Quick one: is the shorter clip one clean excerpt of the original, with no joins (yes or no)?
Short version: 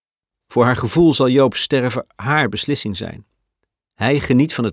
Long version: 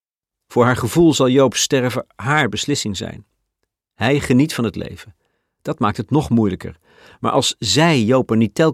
yes